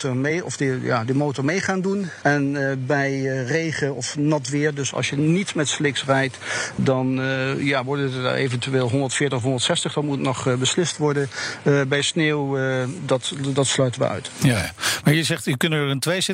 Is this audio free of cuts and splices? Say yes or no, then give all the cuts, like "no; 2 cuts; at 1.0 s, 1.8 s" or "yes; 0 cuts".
yes; 0 cuts